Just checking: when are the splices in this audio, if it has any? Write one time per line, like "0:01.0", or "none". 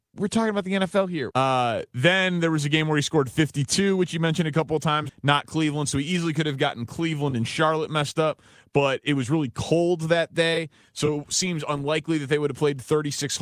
0:01.3
0:05.1